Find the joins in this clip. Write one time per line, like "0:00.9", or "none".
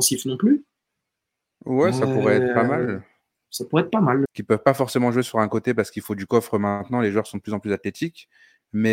0:04.3